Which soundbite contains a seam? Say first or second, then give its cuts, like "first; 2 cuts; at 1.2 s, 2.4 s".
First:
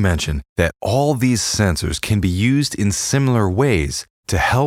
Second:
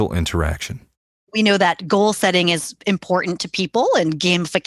second; 1 cut; at 1.1 s